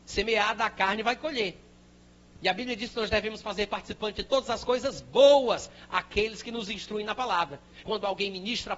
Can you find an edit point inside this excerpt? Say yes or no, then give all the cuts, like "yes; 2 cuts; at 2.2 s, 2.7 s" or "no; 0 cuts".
yes; 1 cut; at 7.8 s